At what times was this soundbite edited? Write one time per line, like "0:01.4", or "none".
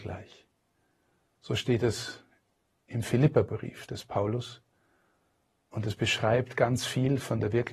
none